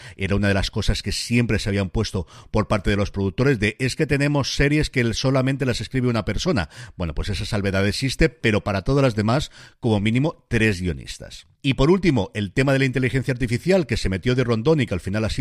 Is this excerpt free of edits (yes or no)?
yes